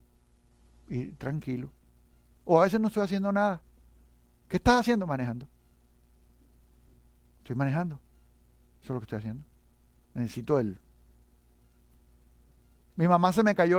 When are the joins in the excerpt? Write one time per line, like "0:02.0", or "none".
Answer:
none